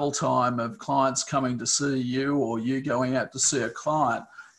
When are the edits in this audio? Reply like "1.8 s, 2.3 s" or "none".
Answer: none